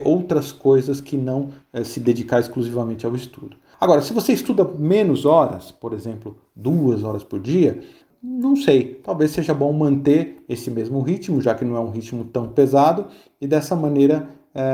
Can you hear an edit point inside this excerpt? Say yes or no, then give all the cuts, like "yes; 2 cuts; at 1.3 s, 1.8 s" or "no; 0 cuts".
no; 0 cuts